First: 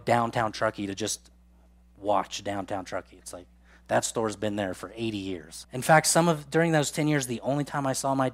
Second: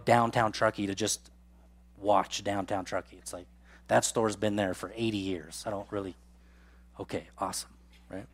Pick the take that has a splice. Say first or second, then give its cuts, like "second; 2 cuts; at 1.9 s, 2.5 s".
first; 1 cut; at 5.6 s